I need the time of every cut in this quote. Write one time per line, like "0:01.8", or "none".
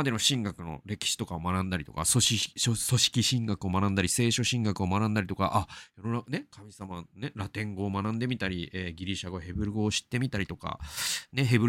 none